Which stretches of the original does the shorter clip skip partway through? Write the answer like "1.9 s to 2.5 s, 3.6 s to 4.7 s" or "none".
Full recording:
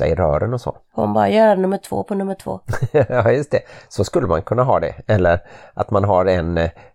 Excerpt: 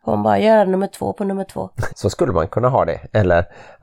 2.8 s to 3.8 s